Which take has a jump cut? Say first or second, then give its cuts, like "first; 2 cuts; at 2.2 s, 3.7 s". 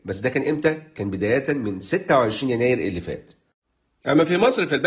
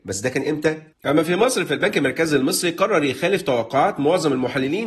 second; 1 cut; at 0.9 s